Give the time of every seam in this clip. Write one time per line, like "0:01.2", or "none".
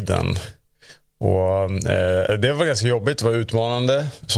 none